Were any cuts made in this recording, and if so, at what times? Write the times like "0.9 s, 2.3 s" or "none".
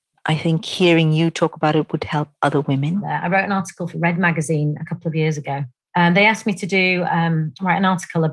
none